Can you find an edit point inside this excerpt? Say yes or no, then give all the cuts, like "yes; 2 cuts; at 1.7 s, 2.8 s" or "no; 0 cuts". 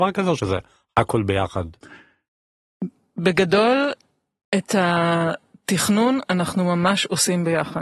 no; 0 cuts